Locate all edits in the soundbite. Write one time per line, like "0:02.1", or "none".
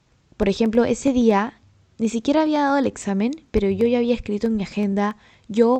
none